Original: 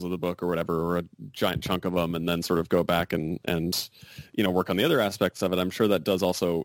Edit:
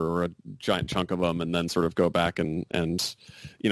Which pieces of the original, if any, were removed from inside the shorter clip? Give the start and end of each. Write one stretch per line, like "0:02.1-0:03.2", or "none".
none